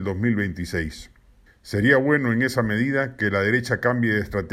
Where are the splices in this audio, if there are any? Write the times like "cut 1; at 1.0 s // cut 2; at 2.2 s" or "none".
cut 1; at 1.5 s